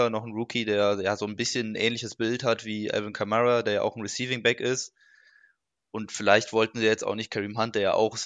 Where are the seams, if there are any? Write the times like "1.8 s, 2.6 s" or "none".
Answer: none